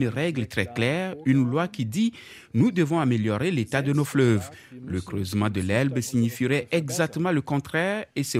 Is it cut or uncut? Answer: uncut